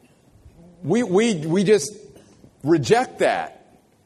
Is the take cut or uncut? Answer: uncut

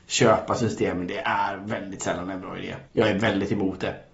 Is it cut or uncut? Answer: cut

